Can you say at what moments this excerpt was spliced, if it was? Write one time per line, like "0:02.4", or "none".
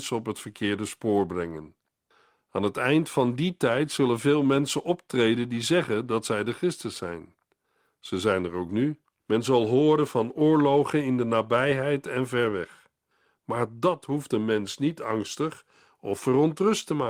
0:09.2

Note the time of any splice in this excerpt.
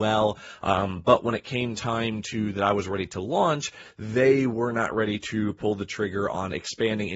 none

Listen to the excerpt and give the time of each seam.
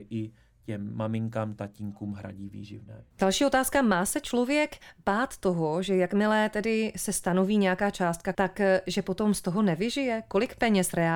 0:03.1
0:08.3

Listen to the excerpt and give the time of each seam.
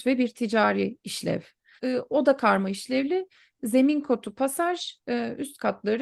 0:01.8

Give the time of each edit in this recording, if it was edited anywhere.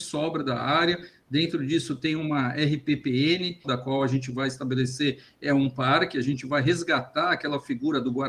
0:03.6

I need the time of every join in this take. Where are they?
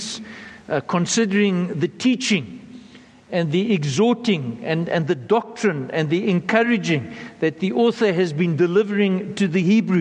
none

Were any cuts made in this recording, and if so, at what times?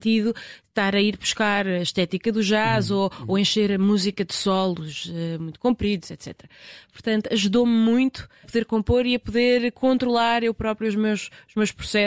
0:06.9
0:08.4

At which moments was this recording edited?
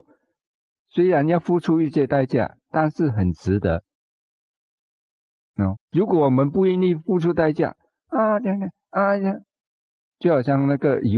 0:05.8

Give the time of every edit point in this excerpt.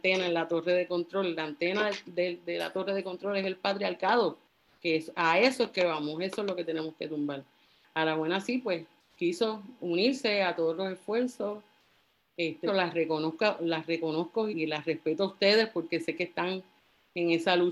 0:12.7
0:14.5

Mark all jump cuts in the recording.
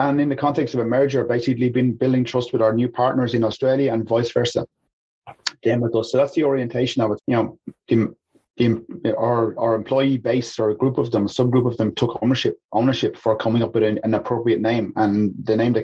0:07.2

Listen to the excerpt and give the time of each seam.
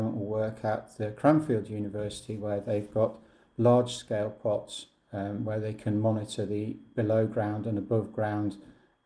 none

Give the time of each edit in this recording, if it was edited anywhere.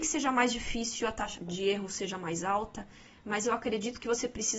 0:01.4

